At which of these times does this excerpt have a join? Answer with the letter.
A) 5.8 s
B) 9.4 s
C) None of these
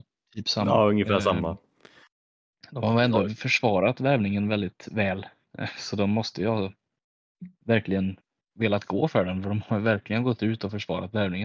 C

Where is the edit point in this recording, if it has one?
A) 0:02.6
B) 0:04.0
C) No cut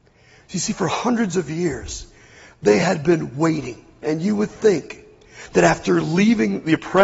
B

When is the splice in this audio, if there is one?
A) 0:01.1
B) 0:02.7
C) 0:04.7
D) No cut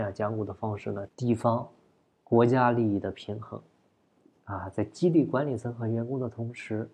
A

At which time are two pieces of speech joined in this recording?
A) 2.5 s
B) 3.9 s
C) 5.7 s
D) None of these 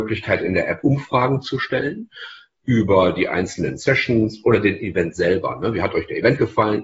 D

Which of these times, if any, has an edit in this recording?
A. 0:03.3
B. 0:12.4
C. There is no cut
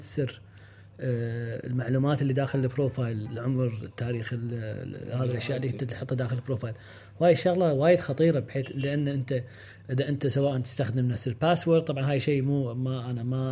A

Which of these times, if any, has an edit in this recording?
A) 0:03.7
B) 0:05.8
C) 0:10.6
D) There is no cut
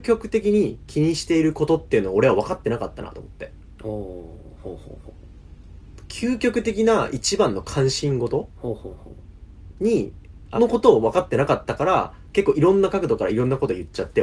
C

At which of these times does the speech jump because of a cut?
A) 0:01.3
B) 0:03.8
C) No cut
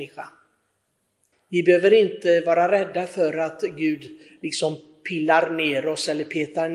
A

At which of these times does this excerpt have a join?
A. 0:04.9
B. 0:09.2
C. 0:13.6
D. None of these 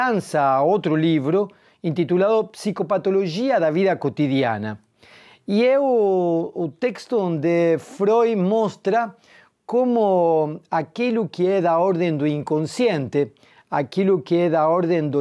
D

